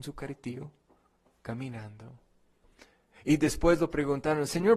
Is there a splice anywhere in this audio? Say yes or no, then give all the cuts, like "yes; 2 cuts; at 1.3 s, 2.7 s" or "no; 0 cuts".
no; 0 cuts